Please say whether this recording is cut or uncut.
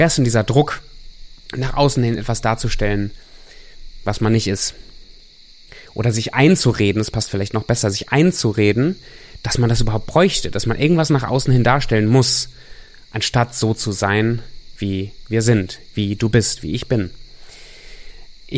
uncut